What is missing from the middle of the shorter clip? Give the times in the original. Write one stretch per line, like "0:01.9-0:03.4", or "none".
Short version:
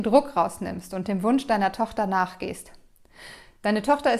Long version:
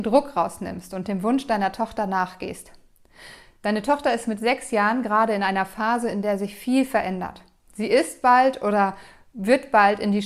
none